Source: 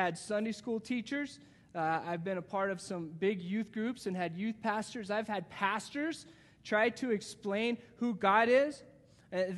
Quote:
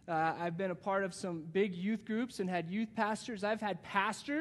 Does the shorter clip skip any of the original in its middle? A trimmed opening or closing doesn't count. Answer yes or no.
no